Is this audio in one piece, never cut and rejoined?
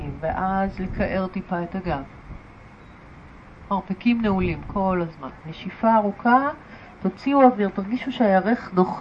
no; 1 cut; at 5.4 s

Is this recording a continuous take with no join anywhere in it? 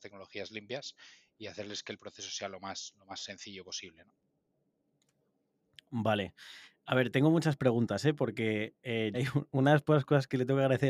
no; 1 cut; at 9.1 s

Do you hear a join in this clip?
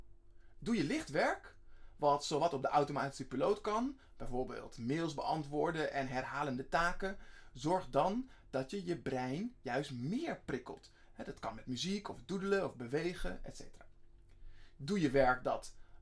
no; 0 cuts

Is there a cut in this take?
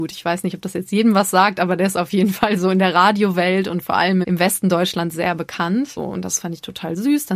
yes; 2 cuts; at 4.2 s, 6.0 s

